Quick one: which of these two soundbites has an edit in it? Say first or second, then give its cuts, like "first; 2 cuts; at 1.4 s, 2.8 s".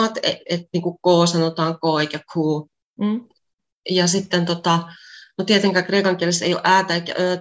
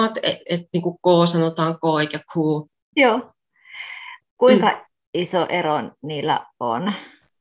second; 2 cuts; at 2.9 s, 4.2 s